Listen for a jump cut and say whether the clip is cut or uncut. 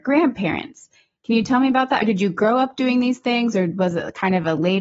uncut